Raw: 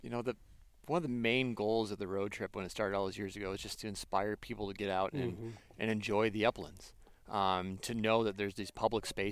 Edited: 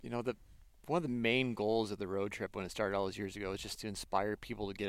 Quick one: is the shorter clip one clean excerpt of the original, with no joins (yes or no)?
yes